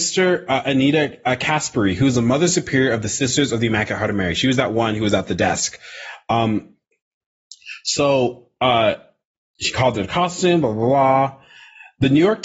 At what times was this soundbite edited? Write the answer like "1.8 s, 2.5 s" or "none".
none